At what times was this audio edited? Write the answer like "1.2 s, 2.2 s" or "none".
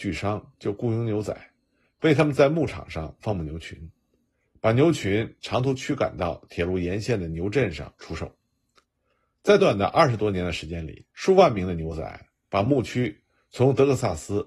9.6 s, 11.1 s